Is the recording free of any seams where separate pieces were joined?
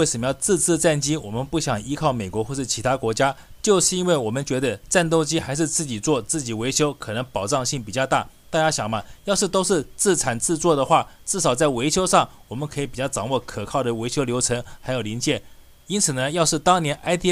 yes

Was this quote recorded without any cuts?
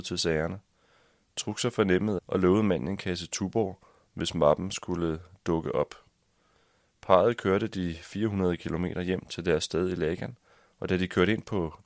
no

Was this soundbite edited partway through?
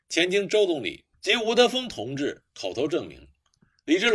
yes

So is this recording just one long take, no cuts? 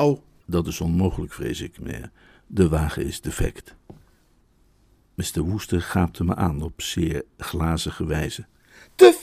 yes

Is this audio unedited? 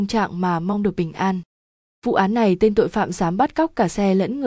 yes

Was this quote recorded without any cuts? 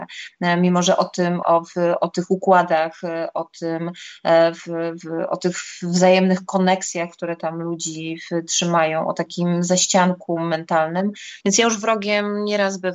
no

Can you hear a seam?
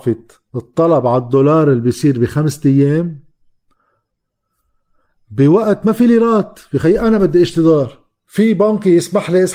no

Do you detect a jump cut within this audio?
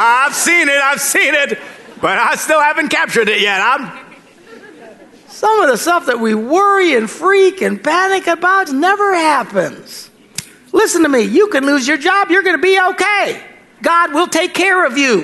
yes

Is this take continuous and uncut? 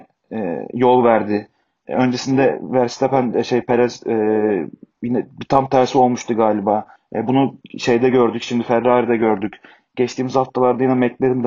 no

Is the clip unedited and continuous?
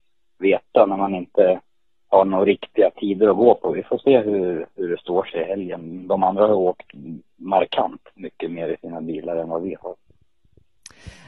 yes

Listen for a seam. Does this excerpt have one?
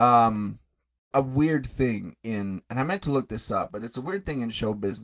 yes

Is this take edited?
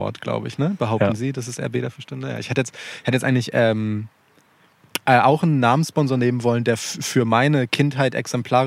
no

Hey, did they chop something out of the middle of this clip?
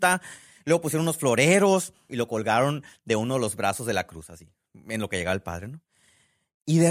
yes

